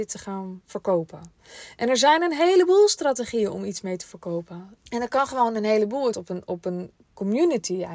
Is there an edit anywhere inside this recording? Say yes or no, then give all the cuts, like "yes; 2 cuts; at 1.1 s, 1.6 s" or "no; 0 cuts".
yes; 2 cuts; at 4.8 s, 6.1 s